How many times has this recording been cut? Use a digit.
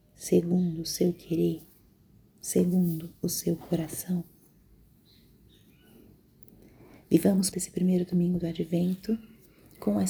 1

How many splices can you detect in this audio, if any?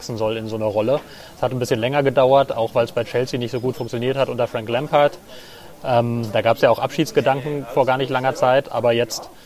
0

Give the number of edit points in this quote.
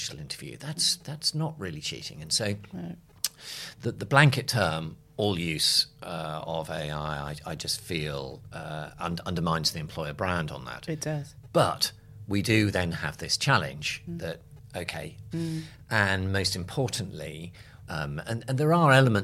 2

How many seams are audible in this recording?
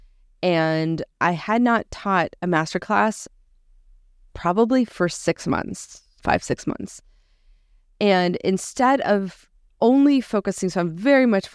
1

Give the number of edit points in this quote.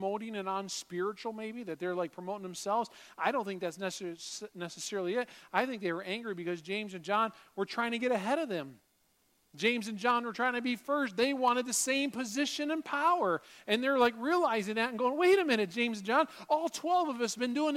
0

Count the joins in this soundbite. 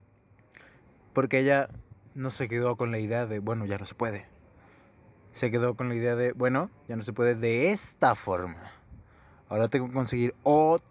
0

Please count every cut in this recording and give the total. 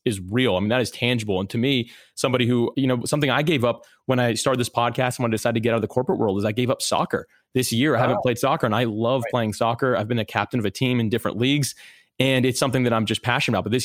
1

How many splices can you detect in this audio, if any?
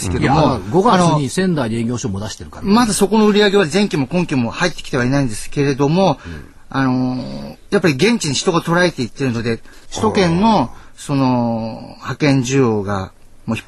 2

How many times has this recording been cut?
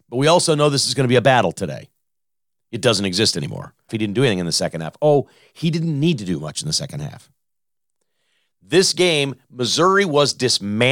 1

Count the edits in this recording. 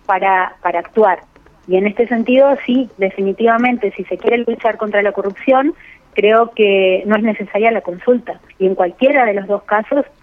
1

